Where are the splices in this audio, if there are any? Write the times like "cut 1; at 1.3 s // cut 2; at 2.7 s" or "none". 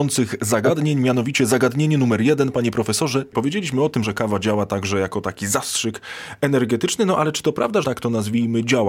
cut 1; at 4.0 s // cut 2; at 7.8 s